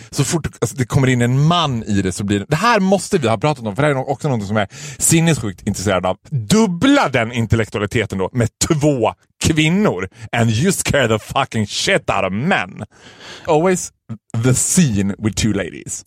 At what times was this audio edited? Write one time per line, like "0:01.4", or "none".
0:06.2
0:13.5